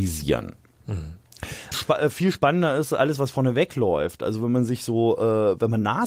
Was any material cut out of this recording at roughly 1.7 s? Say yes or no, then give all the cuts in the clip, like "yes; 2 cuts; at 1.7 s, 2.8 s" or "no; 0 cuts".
yes; 1 cut; at 1.7 s